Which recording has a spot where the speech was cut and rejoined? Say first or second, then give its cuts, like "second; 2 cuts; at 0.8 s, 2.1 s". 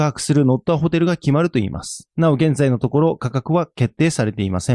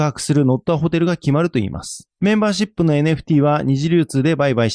first; 1 cut; at 2.1 s